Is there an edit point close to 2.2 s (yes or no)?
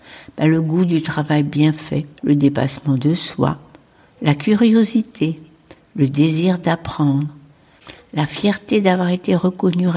yes